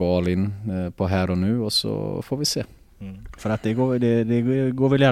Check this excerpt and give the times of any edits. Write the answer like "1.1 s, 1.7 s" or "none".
3.4 s